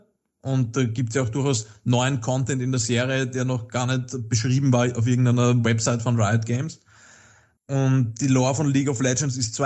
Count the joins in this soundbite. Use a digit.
0